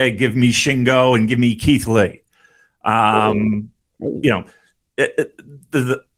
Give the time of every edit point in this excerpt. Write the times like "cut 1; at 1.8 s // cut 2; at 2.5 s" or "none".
none